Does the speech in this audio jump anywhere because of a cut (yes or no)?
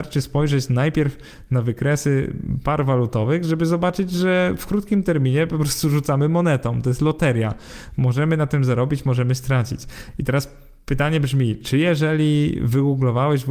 no